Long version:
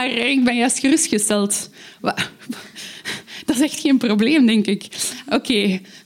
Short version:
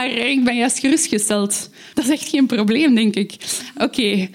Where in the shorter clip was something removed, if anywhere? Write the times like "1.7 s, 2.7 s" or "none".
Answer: 1.9 s